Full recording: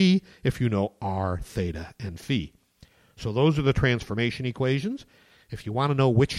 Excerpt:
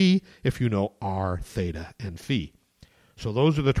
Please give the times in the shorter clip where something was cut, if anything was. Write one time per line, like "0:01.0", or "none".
none